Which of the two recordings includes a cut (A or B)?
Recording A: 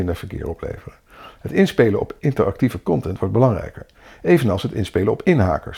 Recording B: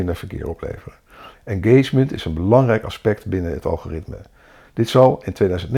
B